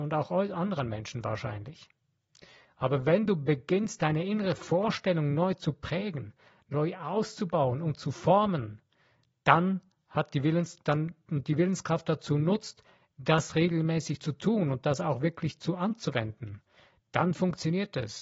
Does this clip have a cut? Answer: no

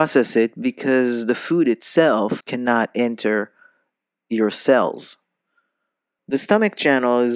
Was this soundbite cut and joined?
yes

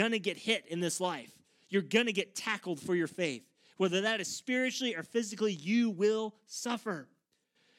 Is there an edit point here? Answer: no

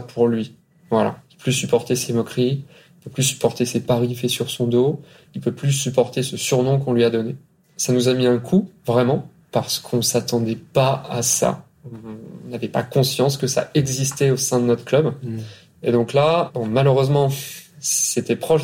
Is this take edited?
no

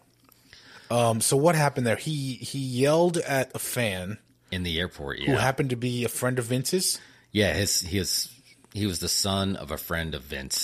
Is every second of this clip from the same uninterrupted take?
yes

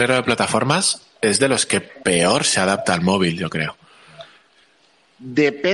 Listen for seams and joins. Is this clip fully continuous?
yes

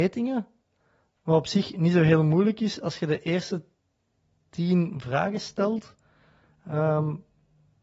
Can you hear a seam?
no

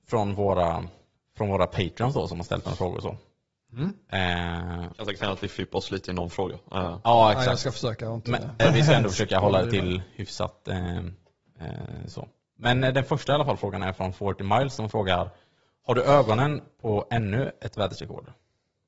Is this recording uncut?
no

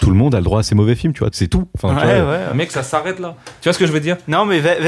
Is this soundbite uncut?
no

